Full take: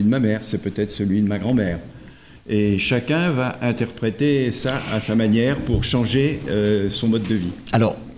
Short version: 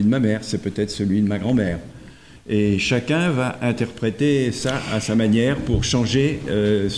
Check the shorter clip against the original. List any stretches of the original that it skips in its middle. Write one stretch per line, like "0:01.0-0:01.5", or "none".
none